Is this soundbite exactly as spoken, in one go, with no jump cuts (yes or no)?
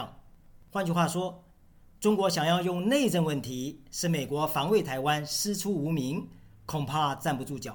yes